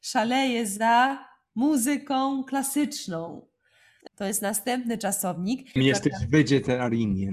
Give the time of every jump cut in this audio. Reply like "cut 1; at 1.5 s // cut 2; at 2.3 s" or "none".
cut 1; at 4.1 s // cut 2; at 5.8 s